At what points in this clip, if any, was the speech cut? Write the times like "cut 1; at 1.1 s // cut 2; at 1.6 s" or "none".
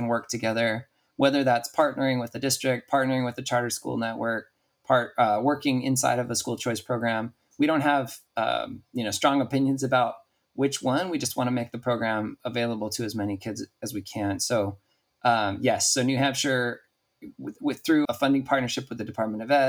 cut 1; at 18.1 s